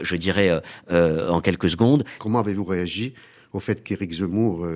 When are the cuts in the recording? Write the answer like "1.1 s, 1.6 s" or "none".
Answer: 2.2 s